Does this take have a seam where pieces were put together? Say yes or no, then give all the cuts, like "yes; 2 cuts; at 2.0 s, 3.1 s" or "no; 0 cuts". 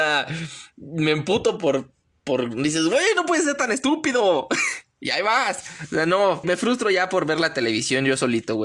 yes; 1 cut; at 6.4 s